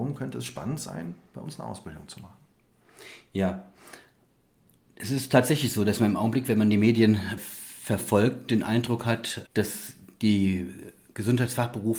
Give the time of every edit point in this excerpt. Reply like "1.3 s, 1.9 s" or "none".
7.4 s, 9.4 s